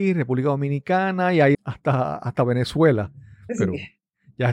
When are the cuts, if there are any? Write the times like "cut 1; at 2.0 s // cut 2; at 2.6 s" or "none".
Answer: cut 1; at 1.5 s // cut 2; at 3.5 s